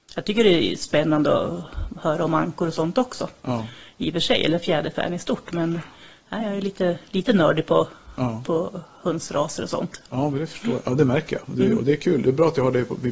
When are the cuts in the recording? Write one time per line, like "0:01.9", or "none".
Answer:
none